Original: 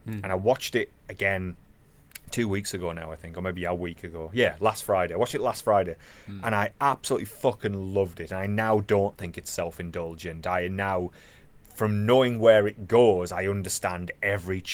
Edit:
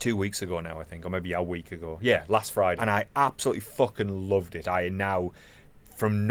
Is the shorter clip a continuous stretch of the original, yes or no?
no